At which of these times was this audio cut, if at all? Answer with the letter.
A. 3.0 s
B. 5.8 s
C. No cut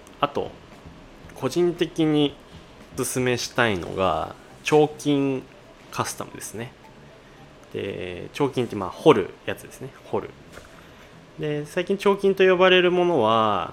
A